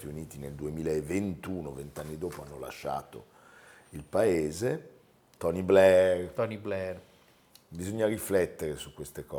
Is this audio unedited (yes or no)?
no